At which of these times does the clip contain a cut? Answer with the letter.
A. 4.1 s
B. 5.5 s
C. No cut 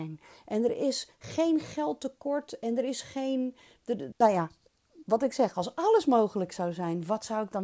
A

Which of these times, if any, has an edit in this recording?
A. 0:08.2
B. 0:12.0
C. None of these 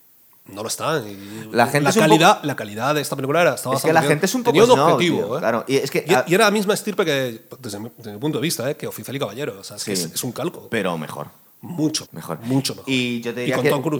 B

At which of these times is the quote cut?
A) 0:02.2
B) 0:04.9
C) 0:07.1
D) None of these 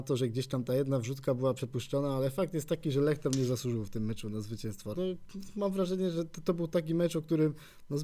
B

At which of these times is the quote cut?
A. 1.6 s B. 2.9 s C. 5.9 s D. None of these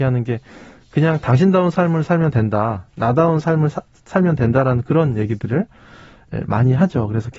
D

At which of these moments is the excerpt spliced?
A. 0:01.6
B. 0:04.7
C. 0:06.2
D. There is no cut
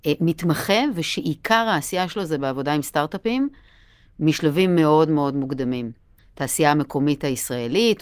C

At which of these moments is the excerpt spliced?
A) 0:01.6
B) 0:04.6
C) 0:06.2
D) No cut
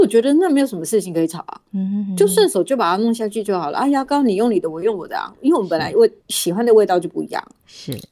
C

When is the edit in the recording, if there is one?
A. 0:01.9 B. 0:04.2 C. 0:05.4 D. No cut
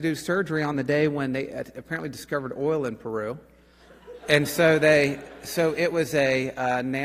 D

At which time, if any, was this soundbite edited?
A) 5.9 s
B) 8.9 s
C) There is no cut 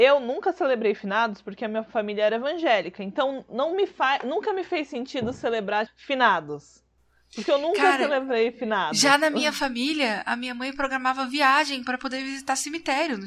A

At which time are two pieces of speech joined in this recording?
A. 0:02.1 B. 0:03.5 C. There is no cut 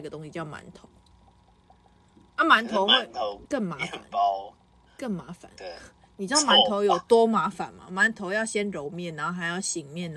B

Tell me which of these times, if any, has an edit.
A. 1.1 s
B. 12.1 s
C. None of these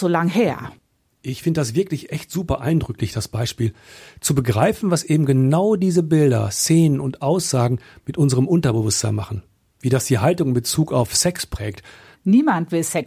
B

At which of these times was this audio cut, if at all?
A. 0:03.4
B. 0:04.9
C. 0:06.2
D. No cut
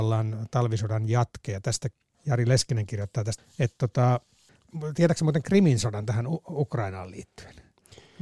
A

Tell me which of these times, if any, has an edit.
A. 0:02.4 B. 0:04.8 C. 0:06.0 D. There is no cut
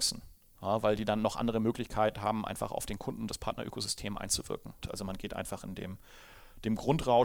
B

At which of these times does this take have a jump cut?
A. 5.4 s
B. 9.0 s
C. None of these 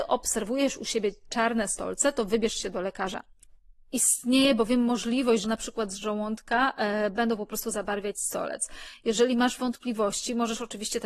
A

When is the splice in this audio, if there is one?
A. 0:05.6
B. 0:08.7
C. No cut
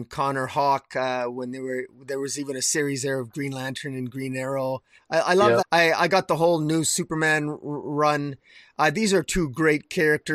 A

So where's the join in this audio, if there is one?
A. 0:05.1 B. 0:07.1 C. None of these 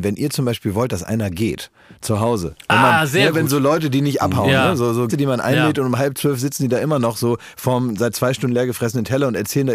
A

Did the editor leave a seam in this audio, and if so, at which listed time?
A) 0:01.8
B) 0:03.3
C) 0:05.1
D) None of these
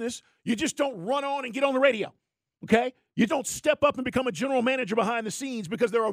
B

